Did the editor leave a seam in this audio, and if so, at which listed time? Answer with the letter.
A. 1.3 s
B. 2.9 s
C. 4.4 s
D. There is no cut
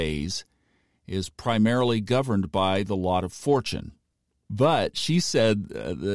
C